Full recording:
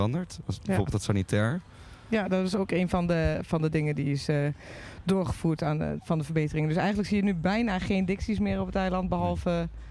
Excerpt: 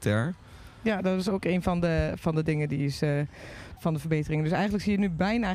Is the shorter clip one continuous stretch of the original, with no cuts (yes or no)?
no